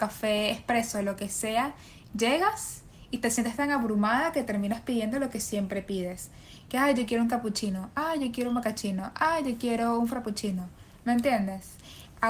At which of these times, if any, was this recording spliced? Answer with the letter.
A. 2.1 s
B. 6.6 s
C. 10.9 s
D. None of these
D